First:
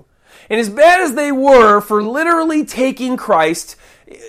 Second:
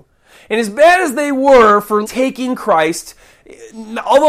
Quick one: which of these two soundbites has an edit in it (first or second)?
second